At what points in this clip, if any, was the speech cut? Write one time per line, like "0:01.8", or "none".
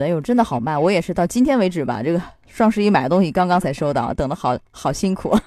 none